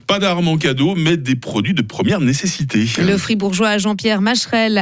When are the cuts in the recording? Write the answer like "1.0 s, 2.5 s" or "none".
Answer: none